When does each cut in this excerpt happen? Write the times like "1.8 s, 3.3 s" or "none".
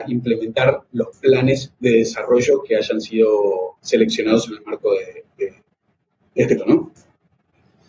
5.3 s, 6.6 s